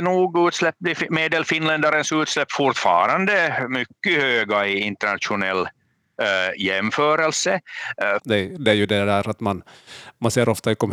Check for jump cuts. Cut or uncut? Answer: cut